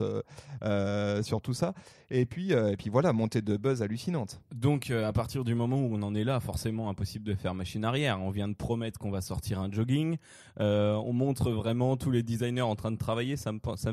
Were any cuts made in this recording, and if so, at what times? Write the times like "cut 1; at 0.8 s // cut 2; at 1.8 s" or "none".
none